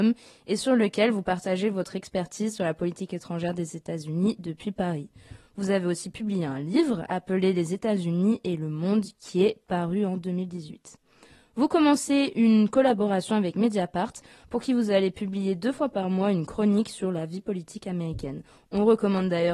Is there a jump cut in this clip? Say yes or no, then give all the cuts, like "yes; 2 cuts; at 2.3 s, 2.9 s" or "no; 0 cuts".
no; 0 cuts